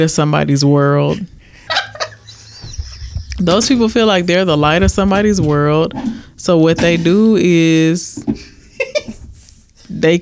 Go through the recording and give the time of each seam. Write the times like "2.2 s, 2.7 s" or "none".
1.7 s